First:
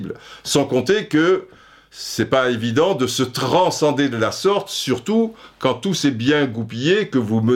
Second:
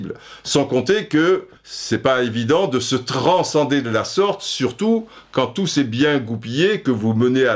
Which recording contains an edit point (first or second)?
second